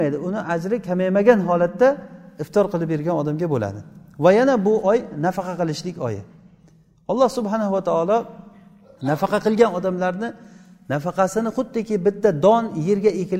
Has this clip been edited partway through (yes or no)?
no